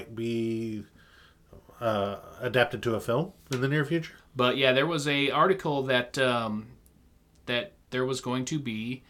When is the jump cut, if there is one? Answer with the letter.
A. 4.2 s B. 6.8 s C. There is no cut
A